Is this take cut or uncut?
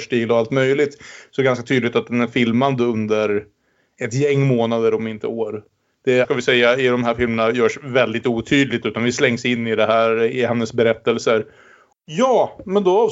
cut